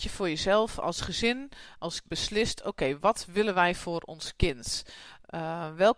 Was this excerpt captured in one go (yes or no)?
no